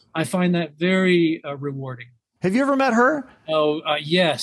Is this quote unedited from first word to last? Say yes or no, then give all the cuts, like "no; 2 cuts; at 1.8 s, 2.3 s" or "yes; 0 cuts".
no; 1 cut; at 2.4 s